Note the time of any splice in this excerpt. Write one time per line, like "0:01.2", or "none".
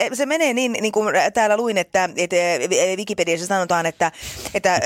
none